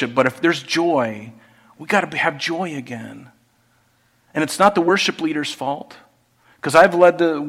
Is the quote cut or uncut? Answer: uncut